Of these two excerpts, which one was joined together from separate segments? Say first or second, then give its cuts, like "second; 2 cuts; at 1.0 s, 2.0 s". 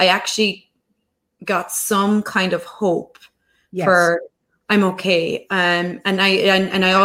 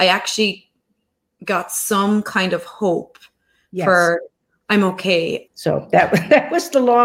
second; 1 cut; at 5.5 s